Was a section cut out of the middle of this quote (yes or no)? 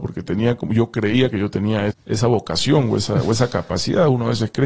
yes